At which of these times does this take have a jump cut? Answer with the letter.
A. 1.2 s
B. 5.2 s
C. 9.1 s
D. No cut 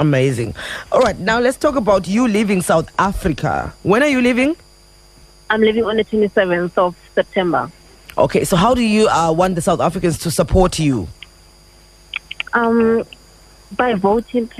D